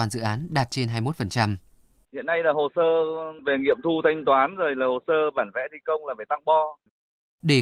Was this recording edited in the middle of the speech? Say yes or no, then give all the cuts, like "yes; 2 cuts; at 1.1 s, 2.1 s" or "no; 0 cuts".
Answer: yes; 1 cut; at 2.0 s